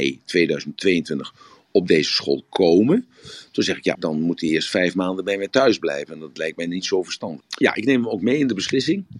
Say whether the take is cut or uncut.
cut